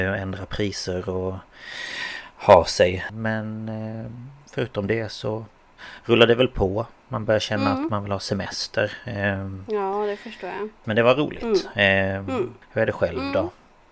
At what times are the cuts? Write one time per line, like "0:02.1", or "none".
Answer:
0:03.1
0:10.8
0:12.6

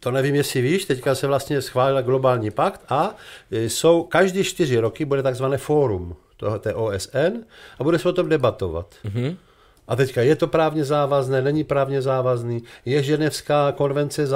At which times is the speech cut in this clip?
none

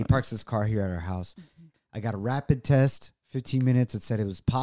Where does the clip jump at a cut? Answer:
0:01.7

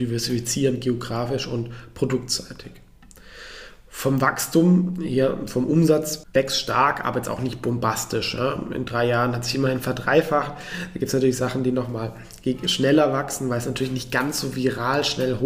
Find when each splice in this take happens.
none

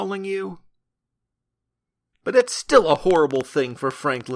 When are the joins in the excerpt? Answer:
0:02.1

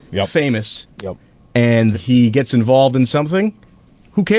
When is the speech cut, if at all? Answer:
0:01.9

